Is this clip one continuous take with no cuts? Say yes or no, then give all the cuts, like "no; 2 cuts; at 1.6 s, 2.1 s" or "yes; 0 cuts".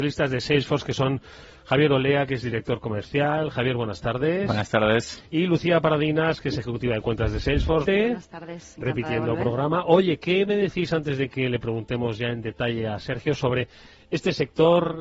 no; 1 cut; at 7.8 s